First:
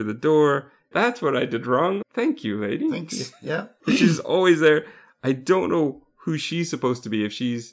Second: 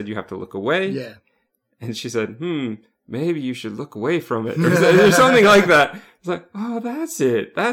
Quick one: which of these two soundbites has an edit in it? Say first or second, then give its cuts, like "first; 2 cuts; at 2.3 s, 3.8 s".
first; 2 cuts; at 0.9 s, 2.0 s